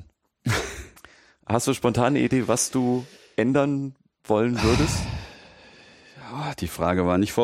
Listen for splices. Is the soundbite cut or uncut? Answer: uncut